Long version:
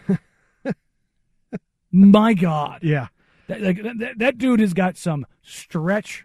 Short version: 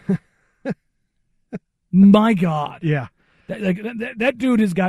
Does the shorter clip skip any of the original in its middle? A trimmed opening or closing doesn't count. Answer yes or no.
no